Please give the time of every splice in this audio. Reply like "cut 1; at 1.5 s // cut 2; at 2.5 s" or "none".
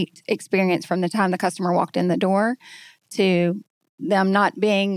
none